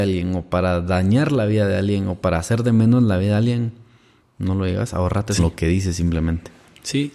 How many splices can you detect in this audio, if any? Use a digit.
1